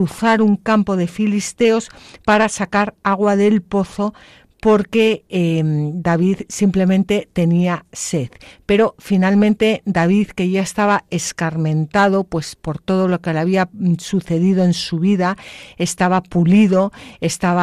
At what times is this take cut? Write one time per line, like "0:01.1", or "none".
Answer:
0:12.6